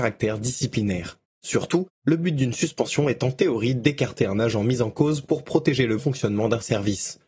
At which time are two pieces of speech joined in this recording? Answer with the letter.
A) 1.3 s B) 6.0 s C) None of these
B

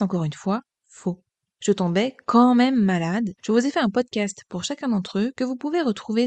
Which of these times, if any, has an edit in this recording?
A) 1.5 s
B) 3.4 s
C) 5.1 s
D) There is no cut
B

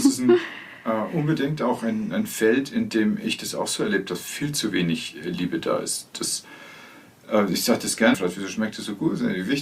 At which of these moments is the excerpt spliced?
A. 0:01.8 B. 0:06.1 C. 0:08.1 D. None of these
C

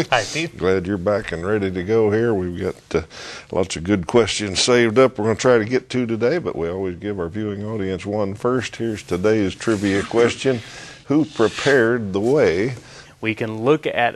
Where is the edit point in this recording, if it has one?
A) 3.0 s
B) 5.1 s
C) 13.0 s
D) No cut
C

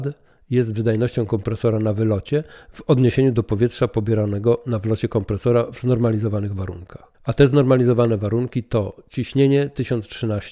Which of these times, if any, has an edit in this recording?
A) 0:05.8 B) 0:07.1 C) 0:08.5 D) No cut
B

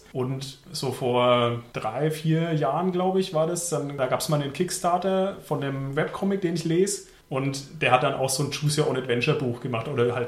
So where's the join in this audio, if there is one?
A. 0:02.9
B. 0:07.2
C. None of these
C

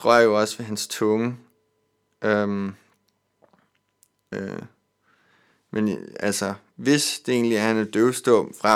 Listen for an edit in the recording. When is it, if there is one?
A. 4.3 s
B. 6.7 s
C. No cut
A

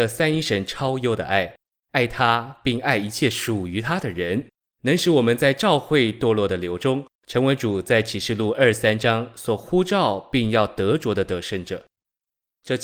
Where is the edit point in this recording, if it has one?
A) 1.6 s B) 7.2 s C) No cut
C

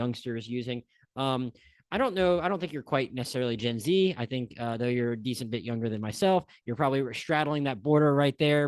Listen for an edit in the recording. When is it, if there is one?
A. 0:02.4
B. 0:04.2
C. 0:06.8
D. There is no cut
D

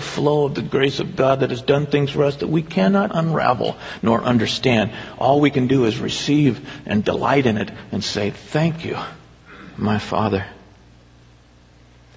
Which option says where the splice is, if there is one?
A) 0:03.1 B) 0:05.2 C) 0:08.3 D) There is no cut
A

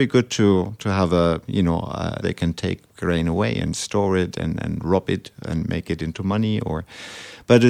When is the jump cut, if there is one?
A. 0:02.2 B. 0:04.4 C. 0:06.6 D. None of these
A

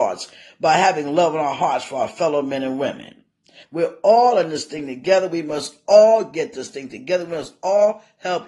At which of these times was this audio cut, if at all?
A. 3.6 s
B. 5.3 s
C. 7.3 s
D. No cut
A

